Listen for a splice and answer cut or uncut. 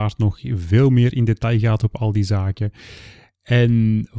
uncut